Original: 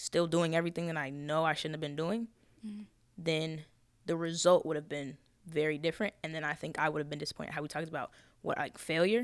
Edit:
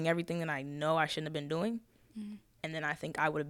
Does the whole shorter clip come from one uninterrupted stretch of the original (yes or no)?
no